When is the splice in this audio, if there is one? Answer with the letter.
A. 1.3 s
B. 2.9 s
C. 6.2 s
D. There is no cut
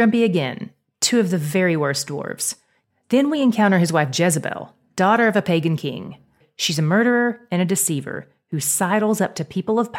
B